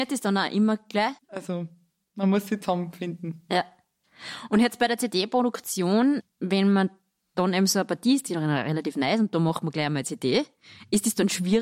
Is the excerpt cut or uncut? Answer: cut